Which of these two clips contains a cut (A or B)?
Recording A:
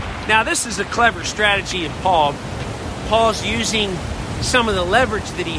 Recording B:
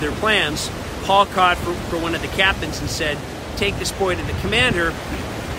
B